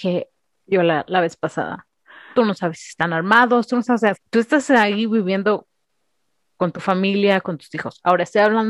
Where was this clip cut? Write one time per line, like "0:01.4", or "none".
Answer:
0:02.3
0:04.1